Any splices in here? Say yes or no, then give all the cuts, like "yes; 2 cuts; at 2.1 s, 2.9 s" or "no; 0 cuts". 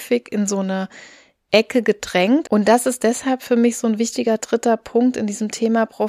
yes; 1 cut; at 2.4 s